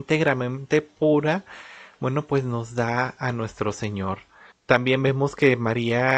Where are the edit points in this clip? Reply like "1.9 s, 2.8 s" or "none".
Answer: 4.5 s